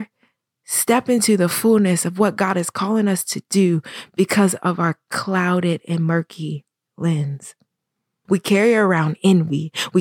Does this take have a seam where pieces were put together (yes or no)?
yes